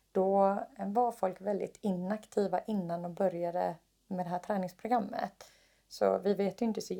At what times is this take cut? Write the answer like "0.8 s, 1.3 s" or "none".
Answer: none